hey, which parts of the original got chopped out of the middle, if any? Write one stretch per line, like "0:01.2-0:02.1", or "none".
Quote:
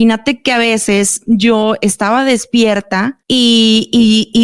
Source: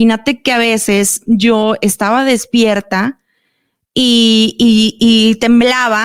0:03.2-0:03.9